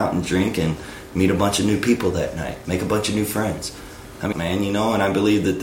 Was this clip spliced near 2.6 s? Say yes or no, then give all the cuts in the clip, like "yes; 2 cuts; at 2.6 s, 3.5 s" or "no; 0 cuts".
no; 1 cut; at 4.3 s